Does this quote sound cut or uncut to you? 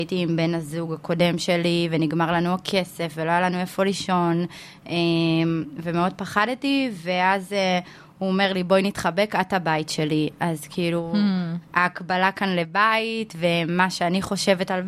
uncut